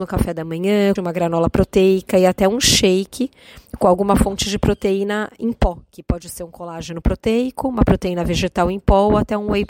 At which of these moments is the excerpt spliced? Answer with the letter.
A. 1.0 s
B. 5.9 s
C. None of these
A